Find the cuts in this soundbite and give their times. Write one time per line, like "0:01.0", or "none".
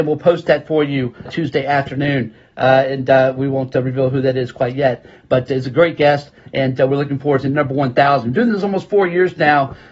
0:01.3